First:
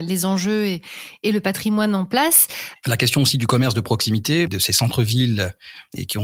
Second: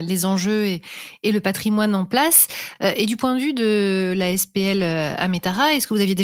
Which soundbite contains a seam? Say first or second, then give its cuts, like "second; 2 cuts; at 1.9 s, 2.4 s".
first; 2 cuts; at 2.8 s, 4.5 s